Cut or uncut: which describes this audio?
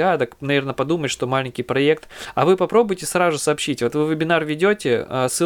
uncut